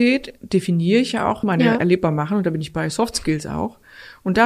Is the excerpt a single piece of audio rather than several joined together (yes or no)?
no